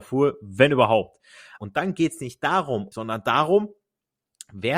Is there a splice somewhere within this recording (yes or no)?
yes